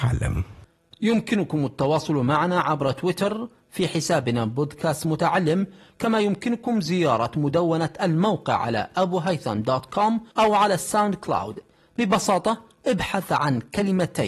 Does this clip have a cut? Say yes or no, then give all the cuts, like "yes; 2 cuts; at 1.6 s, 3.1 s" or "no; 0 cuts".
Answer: yes; 1 cut; at 10.3 s